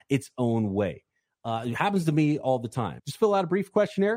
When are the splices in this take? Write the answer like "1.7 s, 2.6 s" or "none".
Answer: 3.0 s